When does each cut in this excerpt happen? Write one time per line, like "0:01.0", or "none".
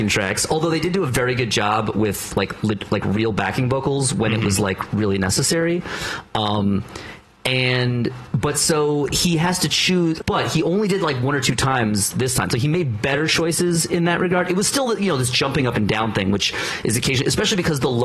0:10.2